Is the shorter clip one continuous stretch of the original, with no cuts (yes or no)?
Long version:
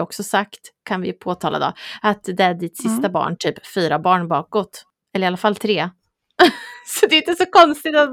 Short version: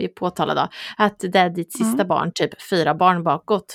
yes